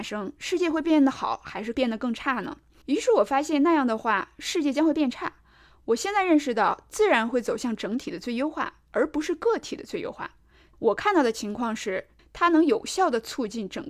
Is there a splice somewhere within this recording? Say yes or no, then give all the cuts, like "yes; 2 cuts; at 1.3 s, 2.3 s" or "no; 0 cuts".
yes; 3 cuts; at 2.8 s, 10.7 s, 12.2 s